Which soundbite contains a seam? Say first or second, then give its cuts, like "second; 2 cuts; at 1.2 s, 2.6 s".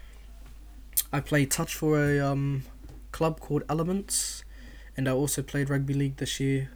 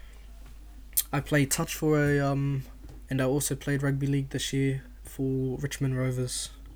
second; 2 cuts; at 3.1 s, 5.0 s